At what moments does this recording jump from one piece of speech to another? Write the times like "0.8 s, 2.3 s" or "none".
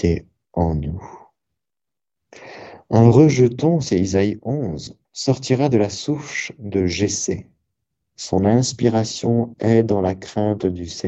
5.0 s, 8.0 s